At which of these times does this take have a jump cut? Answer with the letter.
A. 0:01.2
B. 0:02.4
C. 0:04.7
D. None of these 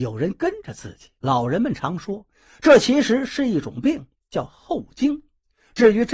A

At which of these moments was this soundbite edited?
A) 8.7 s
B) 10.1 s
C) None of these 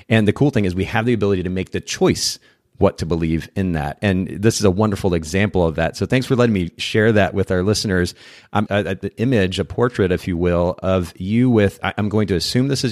A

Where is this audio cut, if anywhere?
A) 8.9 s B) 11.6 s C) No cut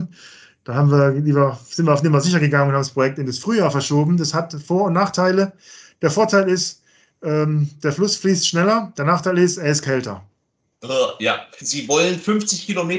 B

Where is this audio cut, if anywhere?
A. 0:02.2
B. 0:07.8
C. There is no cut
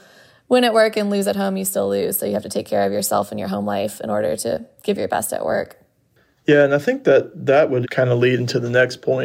B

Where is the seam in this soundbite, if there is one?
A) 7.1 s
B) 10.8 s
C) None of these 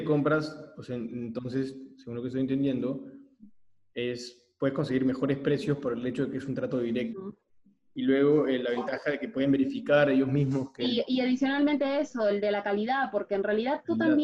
A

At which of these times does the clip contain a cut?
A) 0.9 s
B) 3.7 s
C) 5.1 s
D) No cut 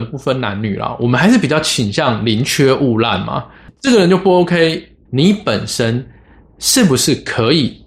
C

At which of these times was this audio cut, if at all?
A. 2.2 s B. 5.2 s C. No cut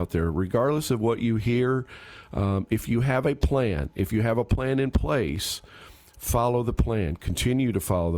C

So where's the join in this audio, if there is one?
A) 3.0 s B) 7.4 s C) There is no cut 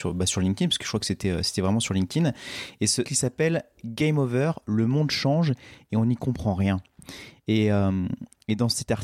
A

